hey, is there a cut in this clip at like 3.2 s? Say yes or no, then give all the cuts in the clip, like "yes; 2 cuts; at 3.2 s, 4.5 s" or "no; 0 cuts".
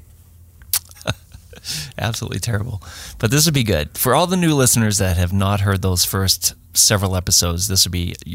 no; 1 cut; at 0.9 s